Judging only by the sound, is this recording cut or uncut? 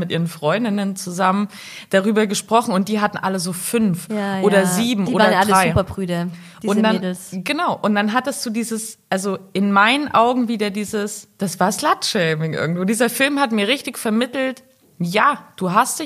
uncut